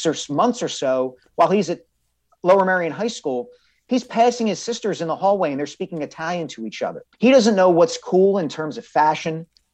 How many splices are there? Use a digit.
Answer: 1